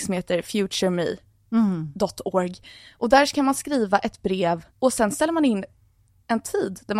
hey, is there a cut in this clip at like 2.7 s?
no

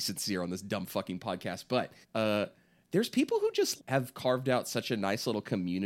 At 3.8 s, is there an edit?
yes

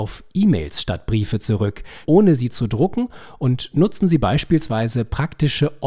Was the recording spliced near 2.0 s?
yes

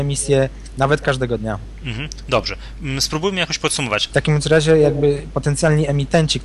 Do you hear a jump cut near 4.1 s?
yes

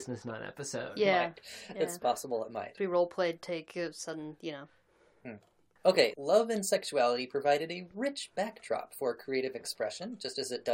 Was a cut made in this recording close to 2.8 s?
yes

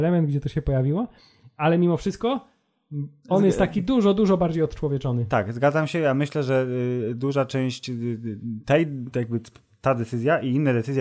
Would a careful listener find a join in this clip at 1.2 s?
no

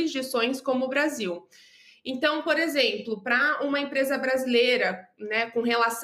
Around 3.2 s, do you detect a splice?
no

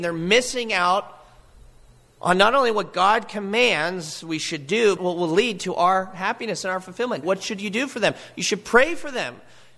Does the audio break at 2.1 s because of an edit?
no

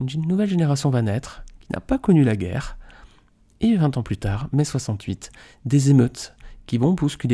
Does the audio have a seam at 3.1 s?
no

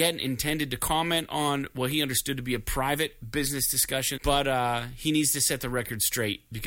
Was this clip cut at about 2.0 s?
no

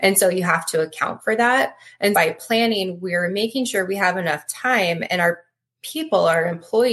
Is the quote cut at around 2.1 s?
yes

